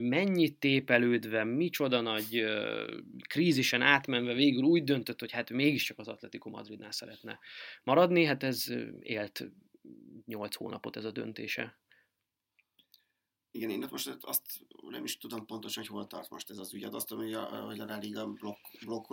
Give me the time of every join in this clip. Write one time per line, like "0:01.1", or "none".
none